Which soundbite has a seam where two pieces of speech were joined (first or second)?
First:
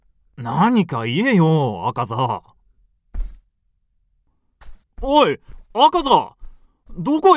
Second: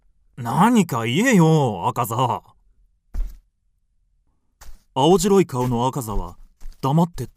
first